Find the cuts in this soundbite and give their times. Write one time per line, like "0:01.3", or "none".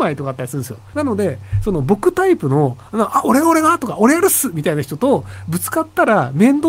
0:00.9